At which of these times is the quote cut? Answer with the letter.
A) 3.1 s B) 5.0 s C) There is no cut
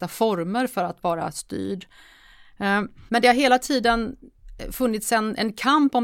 A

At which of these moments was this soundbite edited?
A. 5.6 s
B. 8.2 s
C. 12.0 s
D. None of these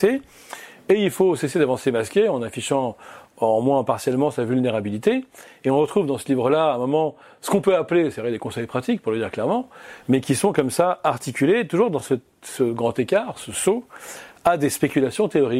D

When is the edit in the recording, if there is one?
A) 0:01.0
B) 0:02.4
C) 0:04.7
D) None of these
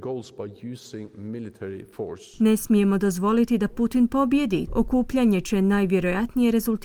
C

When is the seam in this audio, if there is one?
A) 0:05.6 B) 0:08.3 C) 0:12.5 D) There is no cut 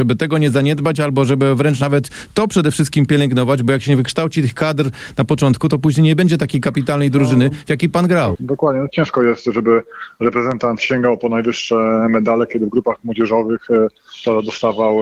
B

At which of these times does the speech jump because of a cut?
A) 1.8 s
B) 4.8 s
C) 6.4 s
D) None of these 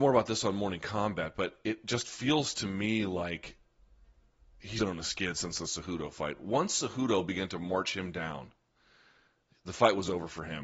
B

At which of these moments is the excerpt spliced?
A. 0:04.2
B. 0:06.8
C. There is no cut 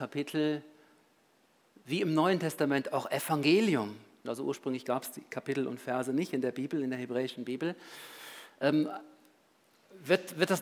A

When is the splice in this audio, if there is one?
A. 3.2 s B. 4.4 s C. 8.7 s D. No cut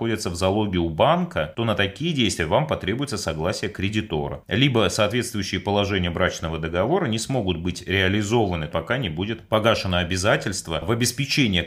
C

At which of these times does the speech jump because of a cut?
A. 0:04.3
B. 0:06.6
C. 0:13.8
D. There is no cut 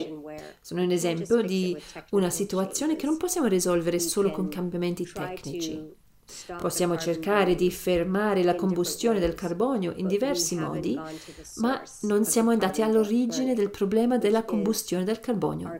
D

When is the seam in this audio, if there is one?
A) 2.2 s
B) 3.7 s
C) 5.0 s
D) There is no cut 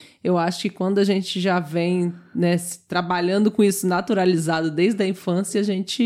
D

